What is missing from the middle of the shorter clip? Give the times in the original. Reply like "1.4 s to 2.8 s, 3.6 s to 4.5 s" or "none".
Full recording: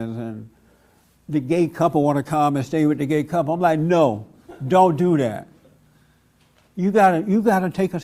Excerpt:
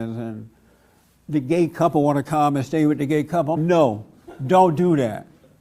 3.6 s to 3.8 s